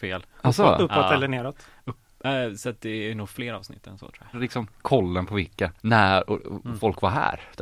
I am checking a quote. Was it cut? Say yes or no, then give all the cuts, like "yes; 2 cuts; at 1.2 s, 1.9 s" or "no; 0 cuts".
yes; 2 cuts; at 4.3 s, 5.8 s